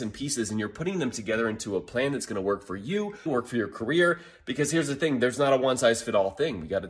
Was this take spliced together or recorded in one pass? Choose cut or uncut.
cut